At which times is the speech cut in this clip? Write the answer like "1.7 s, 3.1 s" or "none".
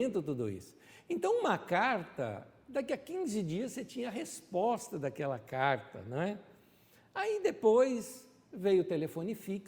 none